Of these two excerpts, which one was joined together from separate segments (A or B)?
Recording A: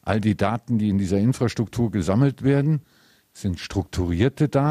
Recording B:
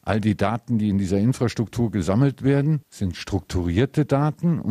B